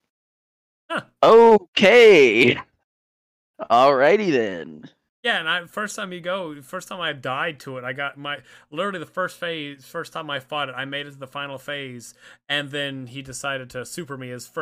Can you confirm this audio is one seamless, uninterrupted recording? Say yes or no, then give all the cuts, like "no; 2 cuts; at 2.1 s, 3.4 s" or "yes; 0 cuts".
yes; 0 cuts